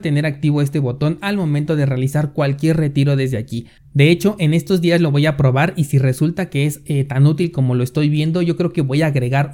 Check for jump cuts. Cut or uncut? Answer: cut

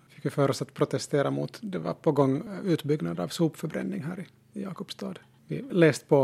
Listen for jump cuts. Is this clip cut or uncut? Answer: uncut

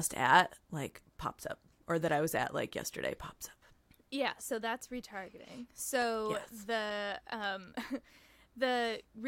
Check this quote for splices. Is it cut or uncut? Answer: uncut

